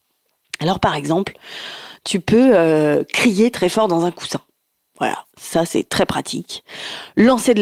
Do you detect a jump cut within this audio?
no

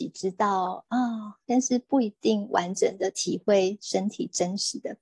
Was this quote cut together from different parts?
yes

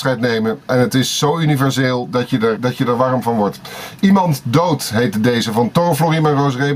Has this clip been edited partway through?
yes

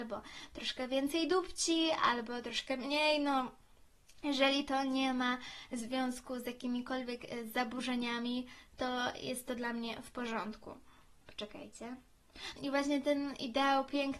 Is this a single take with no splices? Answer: no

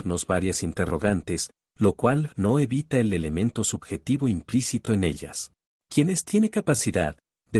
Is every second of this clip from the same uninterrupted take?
no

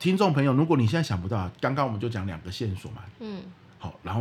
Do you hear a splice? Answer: yes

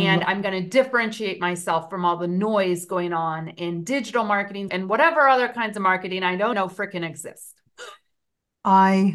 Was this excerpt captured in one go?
no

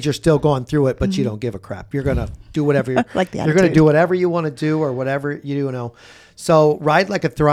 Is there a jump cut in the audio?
no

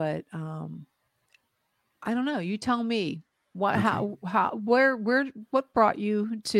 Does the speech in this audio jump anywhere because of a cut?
no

